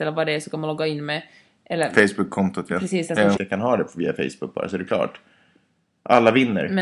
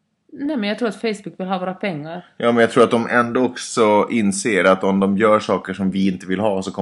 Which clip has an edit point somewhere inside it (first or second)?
first